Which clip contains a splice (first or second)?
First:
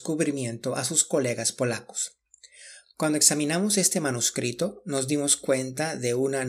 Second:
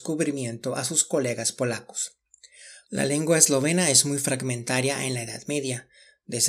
second